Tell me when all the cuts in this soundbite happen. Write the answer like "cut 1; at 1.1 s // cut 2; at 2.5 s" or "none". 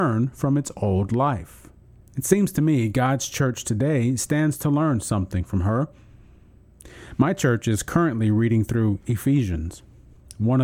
cut 1; at 2.0 s